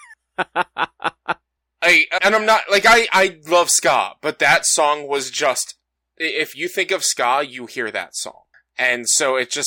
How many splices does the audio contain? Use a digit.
1